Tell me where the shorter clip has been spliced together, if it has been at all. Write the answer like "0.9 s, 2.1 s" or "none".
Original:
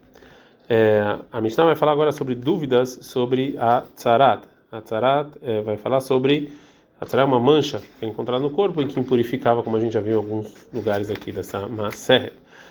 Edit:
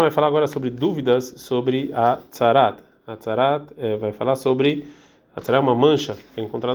none